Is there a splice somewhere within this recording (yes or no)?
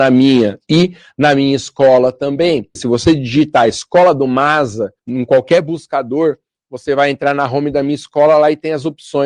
yes